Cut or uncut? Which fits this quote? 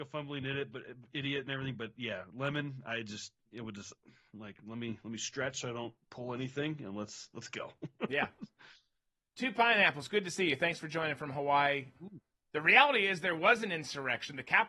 cut